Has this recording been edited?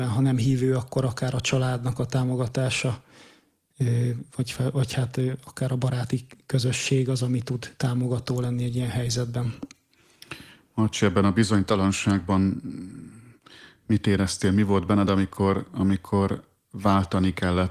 no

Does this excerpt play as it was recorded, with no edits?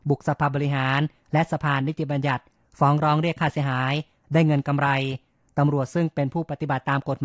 yes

